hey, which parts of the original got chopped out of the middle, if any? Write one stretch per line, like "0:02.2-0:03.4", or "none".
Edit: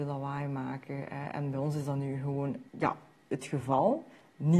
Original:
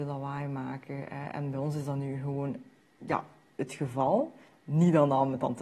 0:02.7-0:03.0